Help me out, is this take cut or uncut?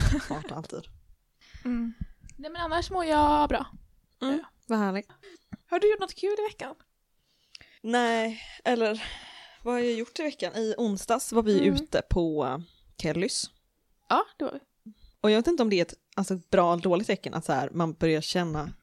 uncut